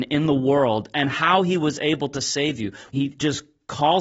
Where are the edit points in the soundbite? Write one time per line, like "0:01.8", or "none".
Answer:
0:02.9